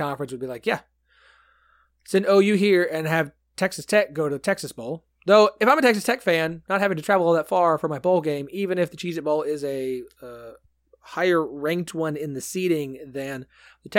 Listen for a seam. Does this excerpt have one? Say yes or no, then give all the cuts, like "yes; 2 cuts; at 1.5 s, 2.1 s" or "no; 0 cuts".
no; 0 cuts